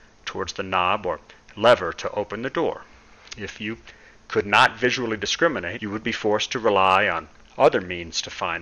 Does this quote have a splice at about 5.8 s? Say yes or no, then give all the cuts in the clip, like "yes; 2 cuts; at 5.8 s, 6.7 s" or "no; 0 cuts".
yes; 1 cut; at 5.8 s